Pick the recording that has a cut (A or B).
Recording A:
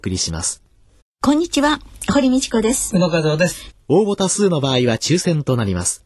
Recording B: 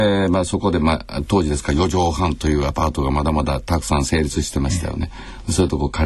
A